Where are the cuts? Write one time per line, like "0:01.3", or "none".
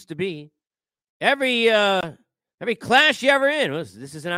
0:01.0